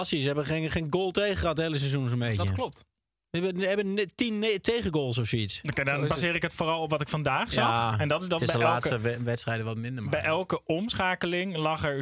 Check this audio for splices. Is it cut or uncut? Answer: uncut